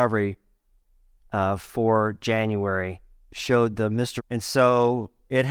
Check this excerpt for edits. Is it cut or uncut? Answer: cut